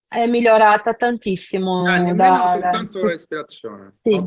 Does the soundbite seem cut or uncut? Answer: uncut